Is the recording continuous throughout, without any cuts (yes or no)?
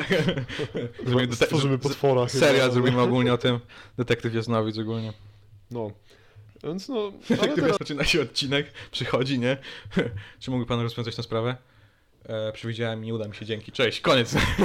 no